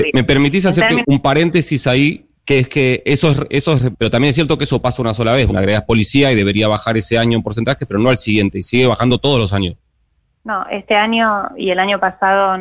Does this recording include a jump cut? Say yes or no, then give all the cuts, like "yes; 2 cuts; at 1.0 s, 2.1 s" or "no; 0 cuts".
yes; 3 cuts; at 1.0 s, 3.9 s, 5.5 s